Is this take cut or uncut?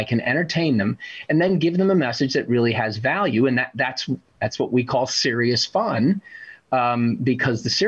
uncut